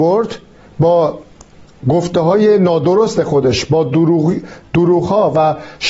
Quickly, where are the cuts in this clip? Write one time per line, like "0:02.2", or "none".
none